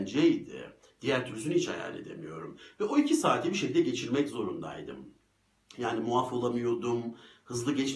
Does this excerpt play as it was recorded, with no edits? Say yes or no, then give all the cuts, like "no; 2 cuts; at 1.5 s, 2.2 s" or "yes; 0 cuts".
yes; 0 cuts